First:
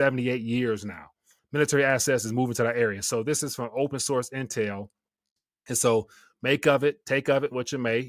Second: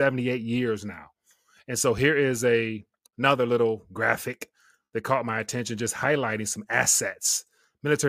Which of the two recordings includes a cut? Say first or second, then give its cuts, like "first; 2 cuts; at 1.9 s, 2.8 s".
first; 1 cut; at 1.4 s